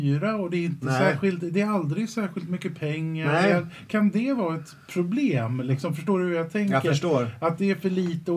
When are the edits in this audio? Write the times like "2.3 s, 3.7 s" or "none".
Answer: none